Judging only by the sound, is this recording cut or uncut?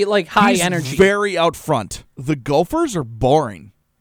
cut